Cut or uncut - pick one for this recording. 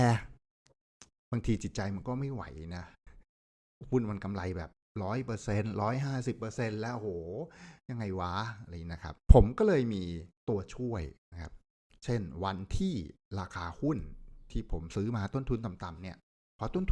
cut